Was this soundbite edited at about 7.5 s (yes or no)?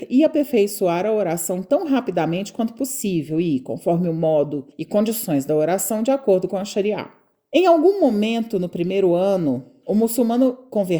no